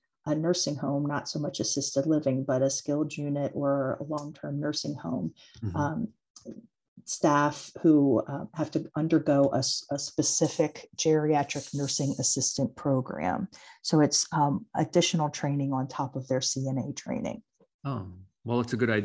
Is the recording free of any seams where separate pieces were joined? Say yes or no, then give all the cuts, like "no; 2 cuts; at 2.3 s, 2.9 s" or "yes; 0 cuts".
yes; 0 cuts